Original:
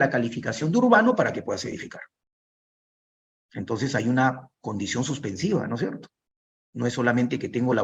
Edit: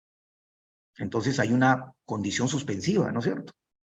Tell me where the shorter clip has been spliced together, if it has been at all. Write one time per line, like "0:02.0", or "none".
none